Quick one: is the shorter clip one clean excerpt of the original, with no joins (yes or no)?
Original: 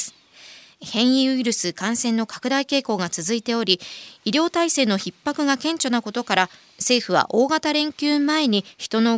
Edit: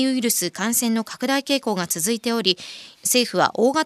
no